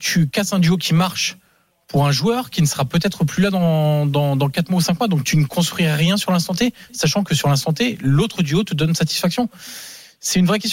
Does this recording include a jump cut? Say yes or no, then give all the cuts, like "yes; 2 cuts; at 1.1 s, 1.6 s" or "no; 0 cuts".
no; 0 cuts